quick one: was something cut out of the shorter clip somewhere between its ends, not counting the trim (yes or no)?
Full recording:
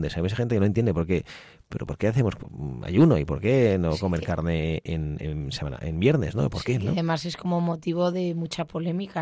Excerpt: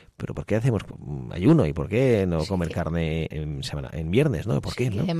yes